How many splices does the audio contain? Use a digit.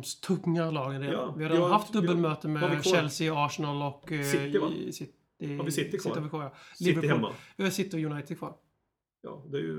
0